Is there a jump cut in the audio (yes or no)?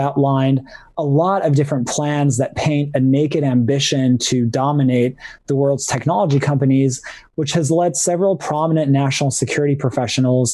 no